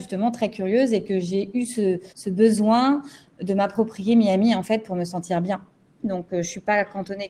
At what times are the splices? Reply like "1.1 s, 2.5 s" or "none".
2.1 s, 6.0 s